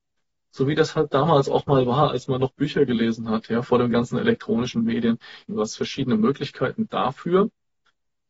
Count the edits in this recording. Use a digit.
1